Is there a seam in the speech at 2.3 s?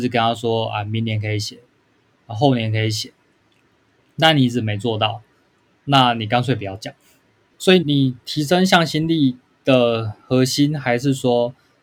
no; 1 cut; at 7.8 s

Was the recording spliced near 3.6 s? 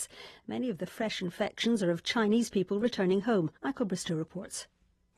yes; 1 cut; at 3.6 s

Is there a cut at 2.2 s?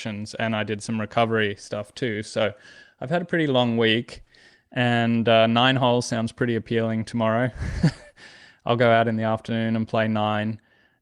no; 0 cuts

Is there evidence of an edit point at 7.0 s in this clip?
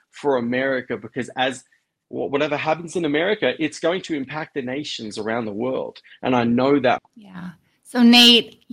yes; 1 cut; at 7.0 s

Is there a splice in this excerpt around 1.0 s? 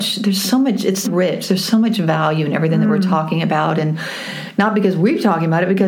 yes; 1 cut; at 1.0 s

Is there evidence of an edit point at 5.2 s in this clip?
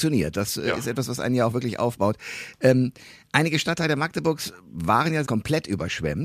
yes; 1 cut; at 5.2 s

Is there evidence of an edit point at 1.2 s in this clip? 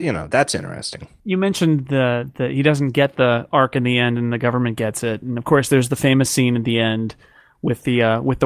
no; 0 cuts

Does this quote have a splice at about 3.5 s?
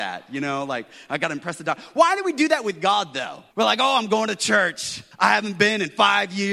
yes; 2 cuts; at 3.5 s, 5.1 s

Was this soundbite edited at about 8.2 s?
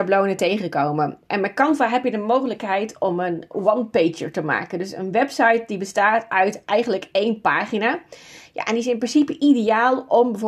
no; 0 cuts

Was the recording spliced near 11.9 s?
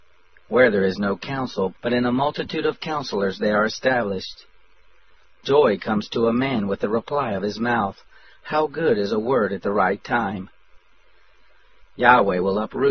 yes; 2 cuts; at 1.7 s, 11.9 s

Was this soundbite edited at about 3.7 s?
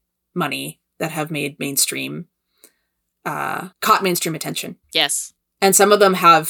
yes; 2 cuts; at 3.7 s, 4.8 s

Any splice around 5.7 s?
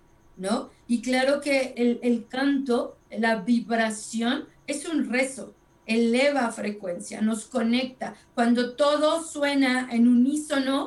no; 1 cut; at 1.7 s

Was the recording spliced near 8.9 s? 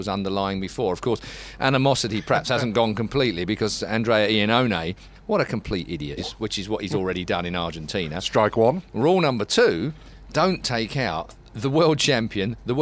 no; 1 cut; at 6.2 s

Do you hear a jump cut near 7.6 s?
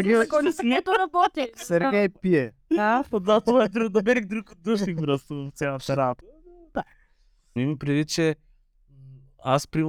yes; 1 cut; at 7.6 s

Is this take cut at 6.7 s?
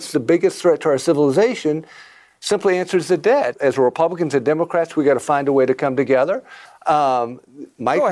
yes; 2 cuts; at 3.5 s, 6.7 s

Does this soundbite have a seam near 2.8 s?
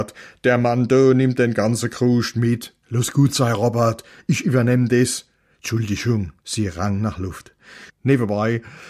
no; 2 cuts; at 6.4 s, 7.9 s

